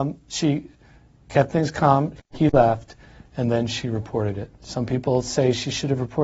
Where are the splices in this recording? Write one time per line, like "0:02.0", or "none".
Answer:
0:02.2